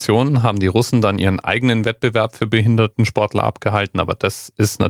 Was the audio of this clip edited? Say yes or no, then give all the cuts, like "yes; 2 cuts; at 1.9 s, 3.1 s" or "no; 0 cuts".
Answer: no; 0 cuts